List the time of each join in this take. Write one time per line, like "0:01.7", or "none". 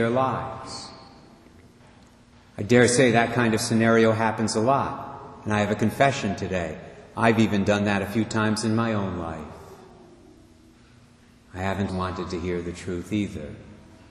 0:11.9